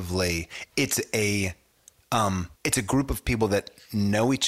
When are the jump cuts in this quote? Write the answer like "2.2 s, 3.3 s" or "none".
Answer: 2.6 s